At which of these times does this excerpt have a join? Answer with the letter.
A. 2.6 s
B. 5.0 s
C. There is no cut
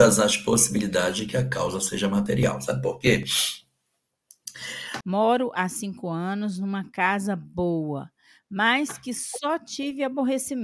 B